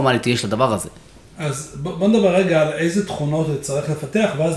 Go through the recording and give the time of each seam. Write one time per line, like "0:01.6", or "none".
none